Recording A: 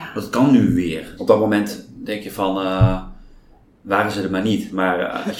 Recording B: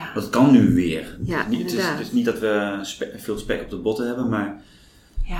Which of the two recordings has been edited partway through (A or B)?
A